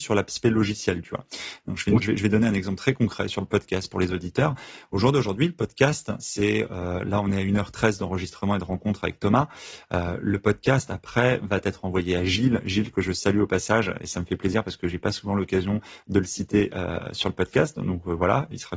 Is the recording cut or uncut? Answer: cut